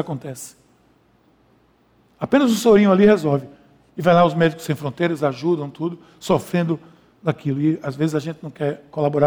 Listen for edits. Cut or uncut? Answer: uncut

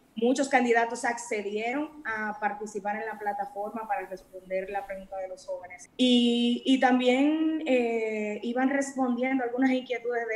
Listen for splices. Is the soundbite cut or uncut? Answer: cut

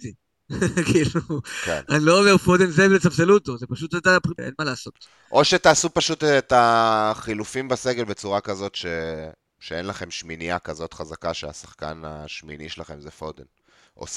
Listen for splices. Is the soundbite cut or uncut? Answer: cut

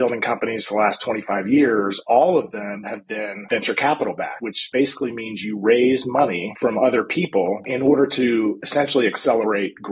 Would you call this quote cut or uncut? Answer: uncut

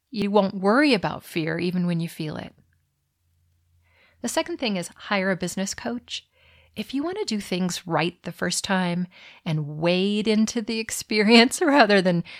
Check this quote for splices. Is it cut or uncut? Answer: uncut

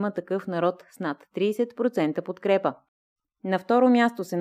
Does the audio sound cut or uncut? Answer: uncut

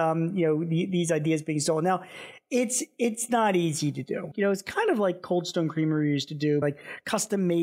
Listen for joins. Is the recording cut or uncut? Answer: cut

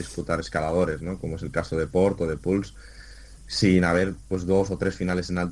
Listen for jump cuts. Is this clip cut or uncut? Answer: uncut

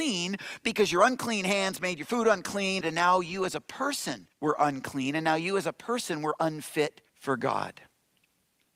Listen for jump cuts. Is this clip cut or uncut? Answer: cut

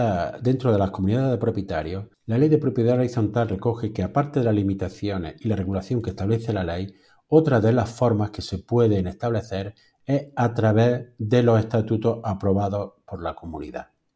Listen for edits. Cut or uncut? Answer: cut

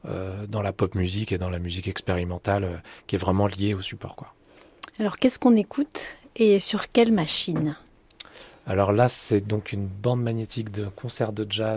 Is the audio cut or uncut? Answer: uncut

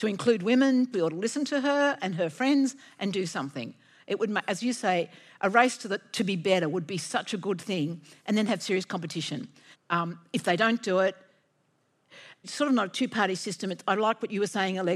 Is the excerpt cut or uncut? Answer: cut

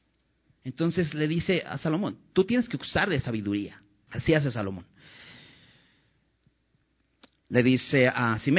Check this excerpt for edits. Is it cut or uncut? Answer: cut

